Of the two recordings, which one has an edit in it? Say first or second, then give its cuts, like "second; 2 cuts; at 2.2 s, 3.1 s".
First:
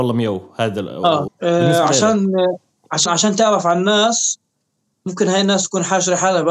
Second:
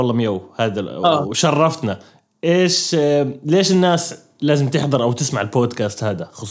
first; 2 cuts; at 1.3 s, 3.1 s